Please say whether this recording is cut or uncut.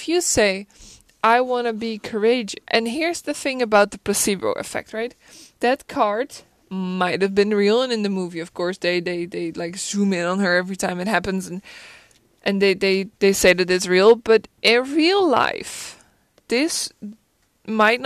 cut